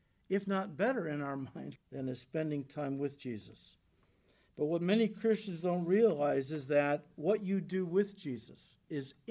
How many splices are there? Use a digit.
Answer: 1